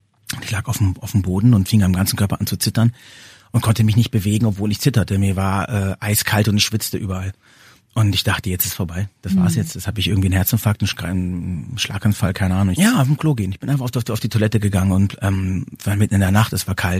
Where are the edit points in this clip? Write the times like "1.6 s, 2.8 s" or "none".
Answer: 12.7 s